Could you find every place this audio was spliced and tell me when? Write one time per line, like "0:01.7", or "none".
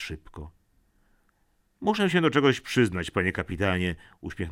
none